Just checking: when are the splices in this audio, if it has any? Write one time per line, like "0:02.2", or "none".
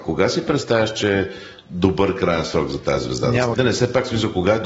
0:03.5

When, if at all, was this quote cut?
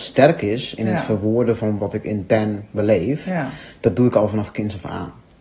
0:01.8

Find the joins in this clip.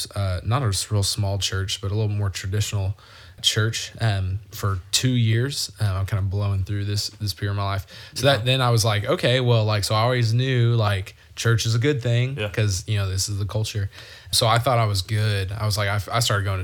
none

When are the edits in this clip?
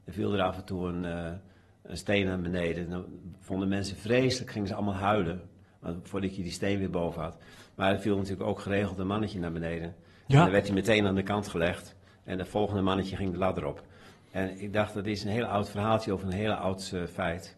none

